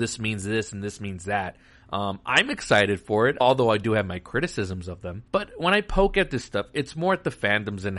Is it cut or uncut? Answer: cut